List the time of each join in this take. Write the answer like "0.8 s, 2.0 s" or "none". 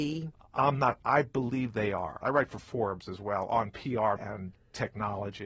2.2 s, 4.2 s